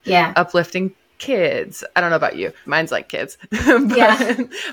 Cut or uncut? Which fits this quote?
cut